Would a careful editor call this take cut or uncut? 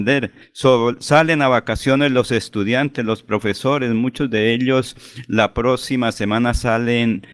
uncut